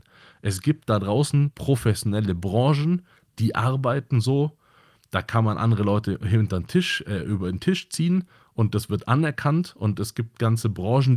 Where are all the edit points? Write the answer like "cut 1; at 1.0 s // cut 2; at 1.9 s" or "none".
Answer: none